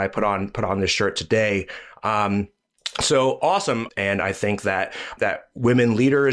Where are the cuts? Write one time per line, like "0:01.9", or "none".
0:03.9
0:05.2